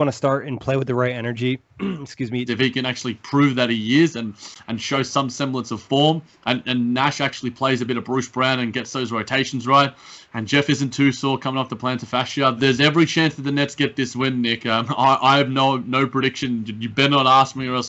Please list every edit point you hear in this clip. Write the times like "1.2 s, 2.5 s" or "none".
2.5 s, 12.6 s